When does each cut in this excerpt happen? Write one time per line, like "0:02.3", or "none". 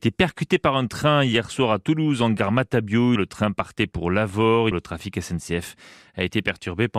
0:03.2
0:04.7